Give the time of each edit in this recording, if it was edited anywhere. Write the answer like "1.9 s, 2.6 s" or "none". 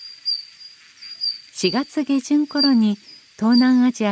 1.5 s